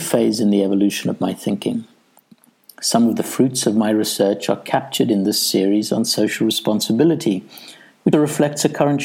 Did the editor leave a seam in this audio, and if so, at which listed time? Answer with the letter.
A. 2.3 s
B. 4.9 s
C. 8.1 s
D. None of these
C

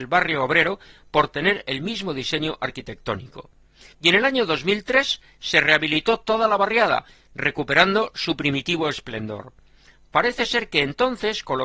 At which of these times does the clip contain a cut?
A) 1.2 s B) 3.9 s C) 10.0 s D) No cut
B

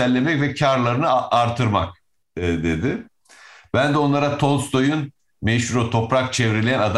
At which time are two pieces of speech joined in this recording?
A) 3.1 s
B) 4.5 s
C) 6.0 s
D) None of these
D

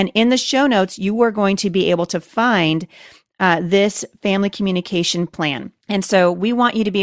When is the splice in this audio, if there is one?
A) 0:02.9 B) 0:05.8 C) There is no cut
B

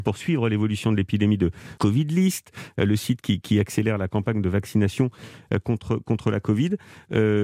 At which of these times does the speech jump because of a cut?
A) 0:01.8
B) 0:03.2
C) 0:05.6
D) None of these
A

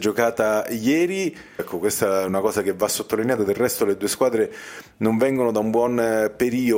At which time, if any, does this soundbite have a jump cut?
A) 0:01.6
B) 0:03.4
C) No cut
A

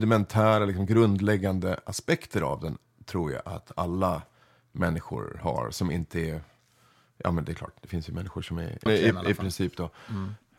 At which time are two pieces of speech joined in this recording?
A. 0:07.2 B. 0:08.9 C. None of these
B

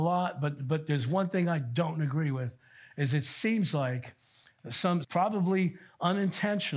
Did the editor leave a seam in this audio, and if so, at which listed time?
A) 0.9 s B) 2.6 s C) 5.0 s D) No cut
C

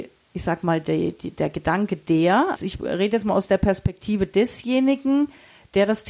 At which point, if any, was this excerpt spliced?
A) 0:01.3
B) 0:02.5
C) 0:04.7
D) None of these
B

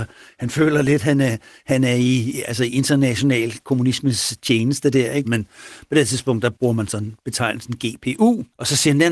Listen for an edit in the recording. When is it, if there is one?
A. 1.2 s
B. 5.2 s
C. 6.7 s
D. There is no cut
B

